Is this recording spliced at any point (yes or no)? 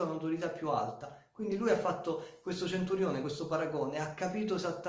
no